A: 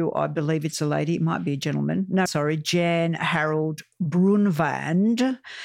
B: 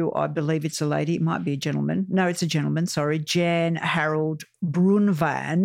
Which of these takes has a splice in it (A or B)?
A